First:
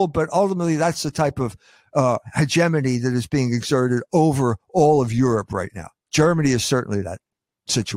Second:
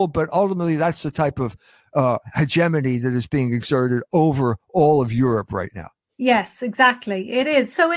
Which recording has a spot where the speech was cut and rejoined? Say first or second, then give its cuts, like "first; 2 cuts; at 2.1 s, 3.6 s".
second; 1 cut; at 6.0 s